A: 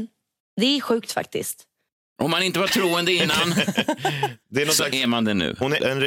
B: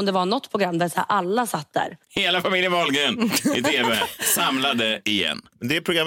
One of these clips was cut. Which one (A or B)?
B